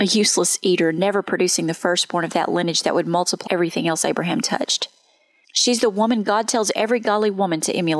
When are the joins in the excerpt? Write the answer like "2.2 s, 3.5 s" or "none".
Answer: 3.5 s, 5.4 s